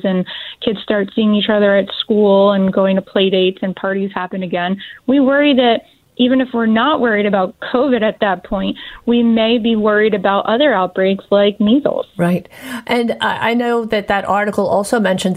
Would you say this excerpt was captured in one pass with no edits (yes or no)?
yes